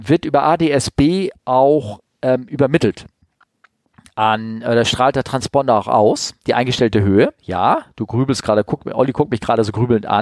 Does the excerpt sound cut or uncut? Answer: uncut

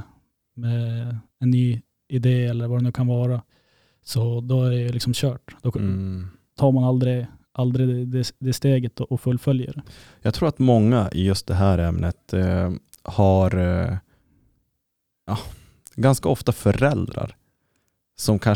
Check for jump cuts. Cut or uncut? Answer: uncut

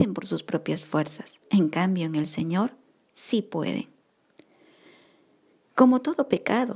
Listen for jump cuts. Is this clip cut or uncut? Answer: cut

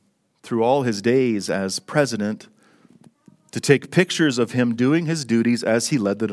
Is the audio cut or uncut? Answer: uncut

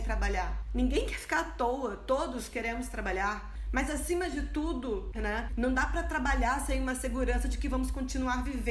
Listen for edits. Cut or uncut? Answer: cut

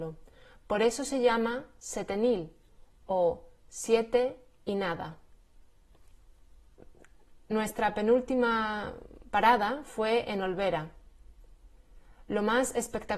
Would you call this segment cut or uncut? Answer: uncut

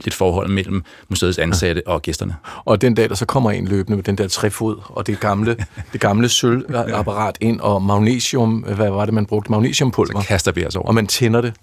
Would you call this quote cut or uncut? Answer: uncut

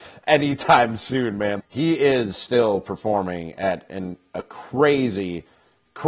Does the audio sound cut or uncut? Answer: cut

